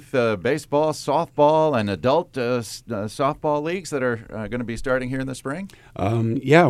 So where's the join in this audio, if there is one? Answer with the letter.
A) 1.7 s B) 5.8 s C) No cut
C